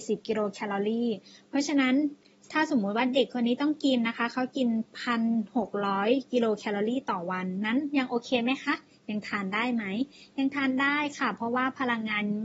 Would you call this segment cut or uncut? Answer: uncut